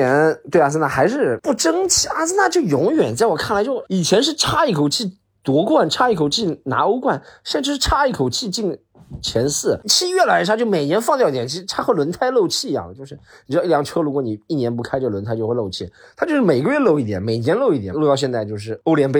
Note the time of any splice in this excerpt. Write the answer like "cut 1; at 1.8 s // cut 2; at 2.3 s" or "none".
cut 1; at 17.9 s